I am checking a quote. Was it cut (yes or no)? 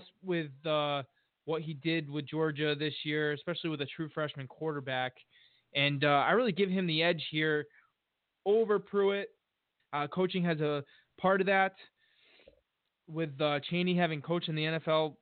yes